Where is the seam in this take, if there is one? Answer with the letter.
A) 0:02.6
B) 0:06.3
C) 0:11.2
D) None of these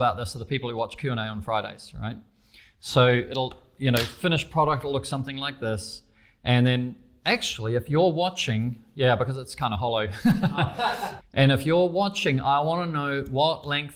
C